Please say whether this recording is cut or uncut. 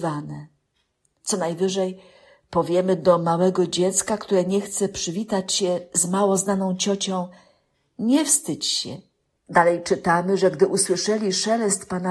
cut